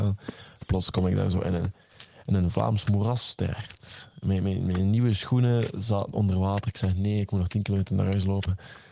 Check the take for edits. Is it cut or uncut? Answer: uncut